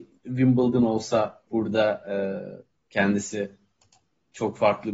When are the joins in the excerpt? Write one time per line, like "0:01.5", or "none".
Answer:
0:01.5